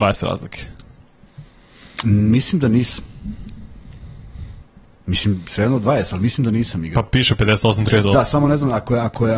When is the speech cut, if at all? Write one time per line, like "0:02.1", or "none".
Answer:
none

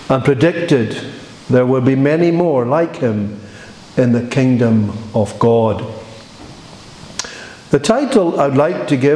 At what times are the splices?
none

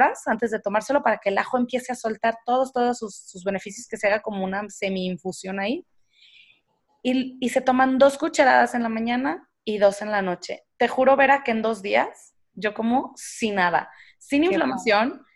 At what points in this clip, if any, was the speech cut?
none

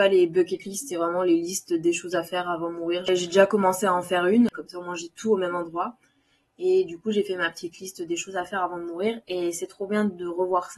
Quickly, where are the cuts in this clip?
0:04.5

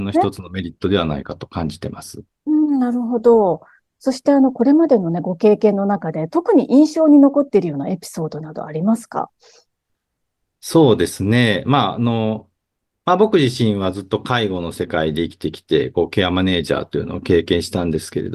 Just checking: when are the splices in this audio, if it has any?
none

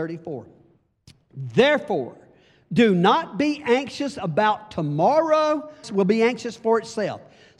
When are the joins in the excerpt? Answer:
0:05.8

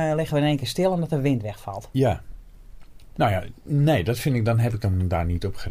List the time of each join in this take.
0:03.1

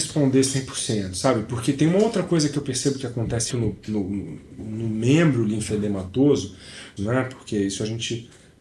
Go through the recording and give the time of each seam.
0:03.5
0:04.6
0:07.0

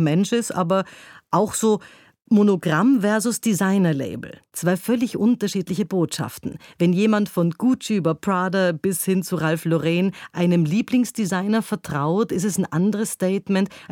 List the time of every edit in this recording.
none

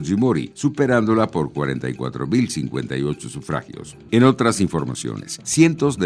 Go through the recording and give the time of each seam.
0:04.1

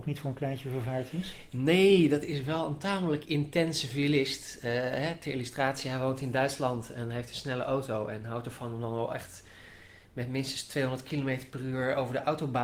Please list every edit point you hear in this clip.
none

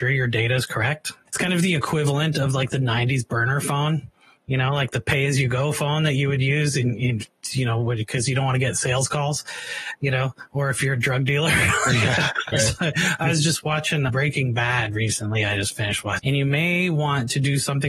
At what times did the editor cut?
0:01.3
0:12.5
0:16.2

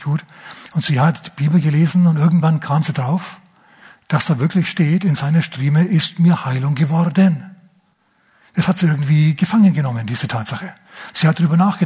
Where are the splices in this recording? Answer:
none

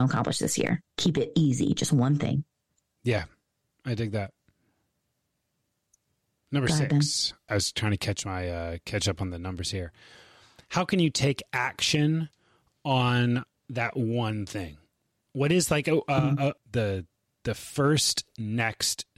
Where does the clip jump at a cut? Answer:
0:07.5
0:16.6

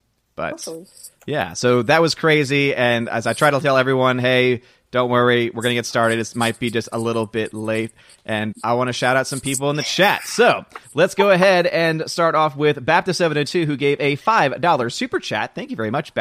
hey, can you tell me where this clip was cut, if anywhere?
0:08.5

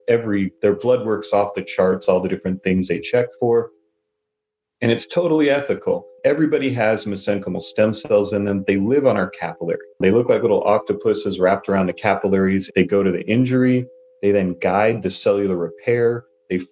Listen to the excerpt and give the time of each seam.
0:09.9
0:12.7

